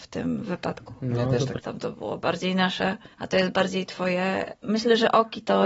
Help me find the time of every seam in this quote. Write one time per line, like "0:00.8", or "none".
0:01.6
0:03.1